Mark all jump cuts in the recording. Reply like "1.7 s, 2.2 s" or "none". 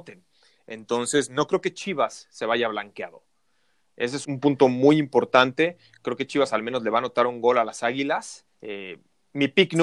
4.2 s, 8.5 s